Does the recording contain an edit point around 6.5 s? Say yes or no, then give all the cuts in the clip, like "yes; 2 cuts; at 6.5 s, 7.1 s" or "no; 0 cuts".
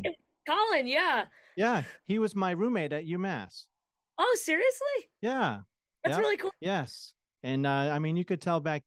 yes; 1 cut; at 6.5 s